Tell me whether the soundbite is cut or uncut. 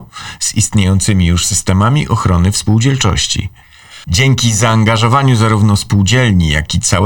cut